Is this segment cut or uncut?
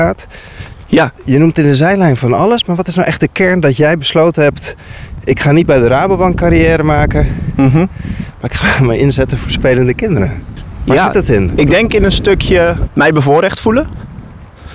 uncut